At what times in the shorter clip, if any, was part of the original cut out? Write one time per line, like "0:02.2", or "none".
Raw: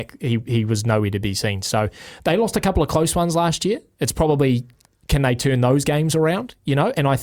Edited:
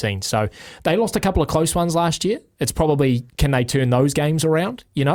0:03.3